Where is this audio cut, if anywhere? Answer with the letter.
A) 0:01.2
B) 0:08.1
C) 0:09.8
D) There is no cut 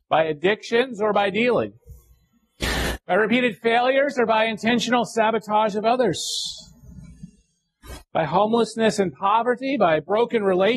D